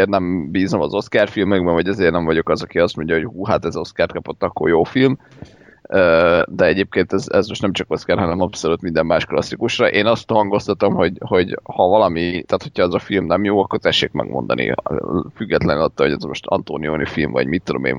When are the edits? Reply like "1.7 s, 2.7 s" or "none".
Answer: none